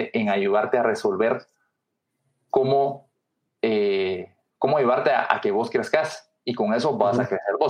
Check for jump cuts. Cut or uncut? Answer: uncut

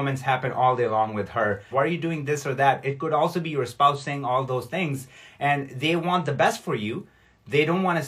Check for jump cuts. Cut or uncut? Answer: cut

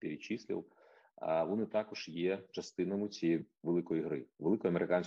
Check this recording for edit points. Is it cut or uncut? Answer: uncut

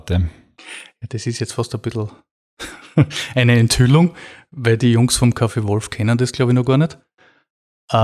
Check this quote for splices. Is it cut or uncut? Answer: uncut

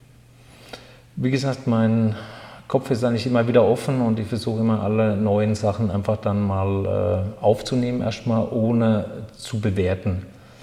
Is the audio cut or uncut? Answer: uncut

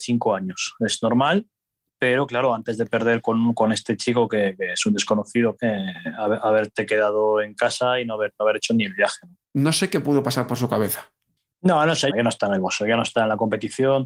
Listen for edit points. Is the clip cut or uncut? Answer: cut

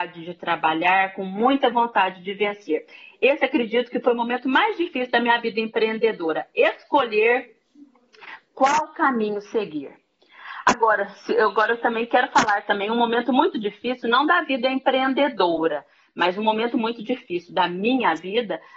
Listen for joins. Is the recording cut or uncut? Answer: uncut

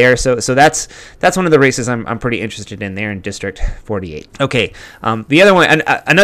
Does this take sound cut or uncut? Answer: cut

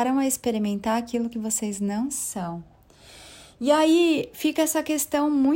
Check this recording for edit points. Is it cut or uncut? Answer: uncut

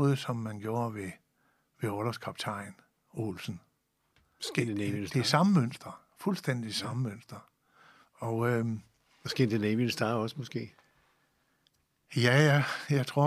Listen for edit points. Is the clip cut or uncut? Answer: uncut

